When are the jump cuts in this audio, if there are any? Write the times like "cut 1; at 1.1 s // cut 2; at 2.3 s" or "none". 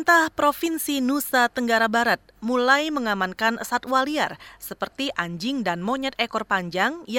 none